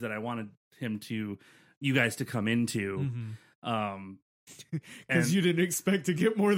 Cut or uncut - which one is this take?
uncut